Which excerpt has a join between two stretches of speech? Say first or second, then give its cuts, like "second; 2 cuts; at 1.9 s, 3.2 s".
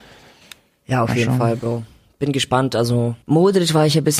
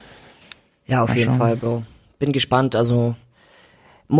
first; 1 cut; at 3.2 s